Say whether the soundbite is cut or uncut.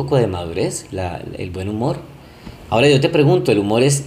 cut